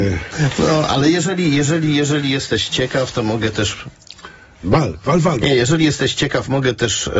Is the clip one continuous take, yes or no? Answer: no